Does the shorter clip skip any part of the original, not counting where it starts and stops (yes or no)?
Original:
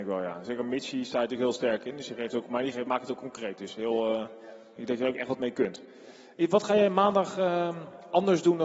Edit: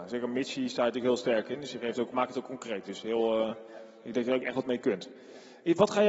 yes